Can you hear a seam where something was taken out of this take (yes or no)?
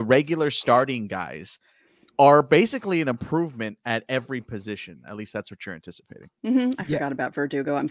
yes